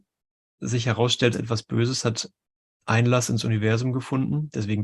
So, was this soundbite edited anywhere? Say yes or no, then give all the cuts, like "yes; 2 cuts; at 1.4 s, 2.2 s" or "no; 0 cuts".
yes; 1 cut; at 1.3 s